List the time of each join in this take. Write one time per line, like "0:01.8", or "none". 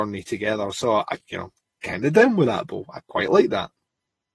none